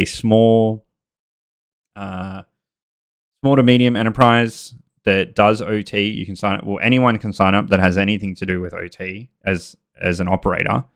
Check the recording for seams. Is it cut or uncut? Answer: uncut